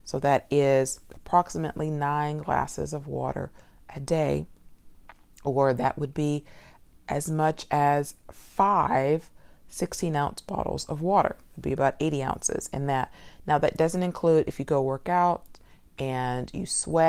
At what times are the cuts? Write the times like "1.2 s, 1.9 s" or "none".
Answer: none